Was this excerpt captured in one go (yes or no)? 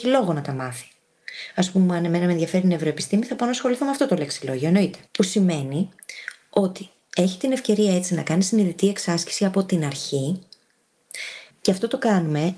no